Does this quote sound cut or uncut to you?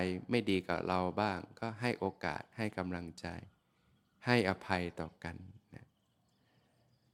uncut